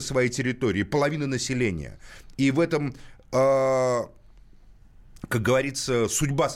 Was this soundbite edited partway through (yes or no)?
no